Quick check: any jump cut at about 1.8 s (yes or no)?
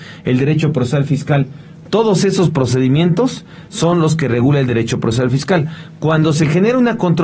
yes